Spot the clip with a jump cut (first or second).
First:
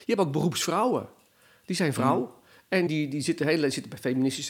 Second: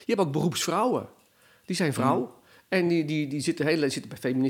first